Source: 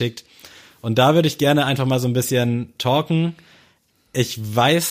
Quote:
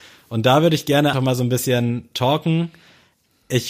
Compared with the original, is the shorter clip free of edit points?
no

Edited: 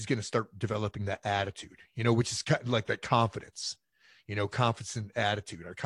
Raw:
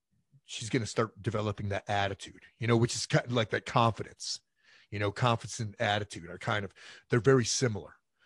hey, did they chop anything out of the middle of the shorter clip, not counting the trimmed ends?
no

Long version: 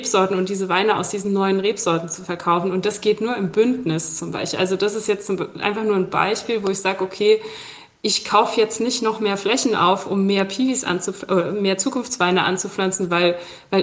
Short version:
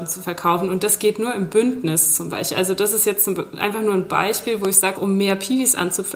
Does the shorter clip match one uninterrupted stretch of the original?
no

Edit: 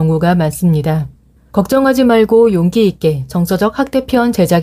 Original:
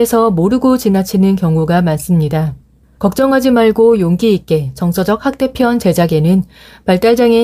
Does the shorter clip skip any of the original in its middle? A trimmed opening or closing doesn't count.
no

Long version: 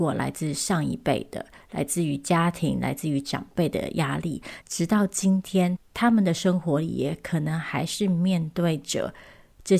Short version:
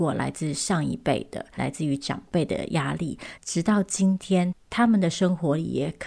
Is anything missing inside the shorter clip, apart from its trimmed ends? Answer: yes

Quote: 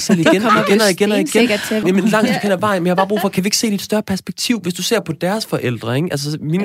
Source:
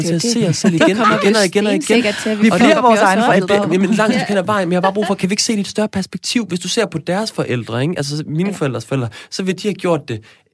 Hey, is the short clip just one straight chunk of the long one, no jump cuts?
no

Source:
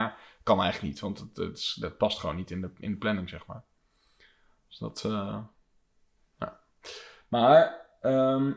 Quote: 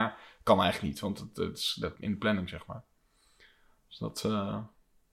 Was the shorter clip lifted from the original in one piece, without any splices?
no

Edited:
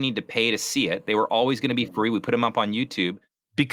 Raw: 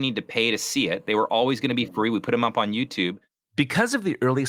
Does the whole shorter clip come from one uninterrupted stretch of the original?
yes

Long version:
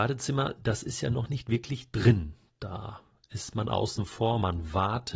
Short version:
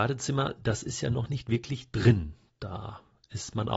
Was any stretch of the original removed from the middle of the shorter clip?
no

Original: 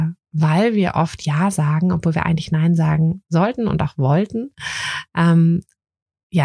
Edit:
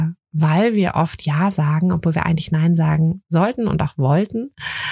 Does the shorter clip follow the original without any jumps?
yes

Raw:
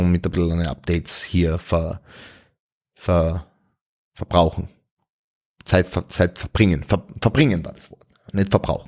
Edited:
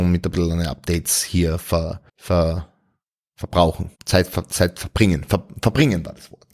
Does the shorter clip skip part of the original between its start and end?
yes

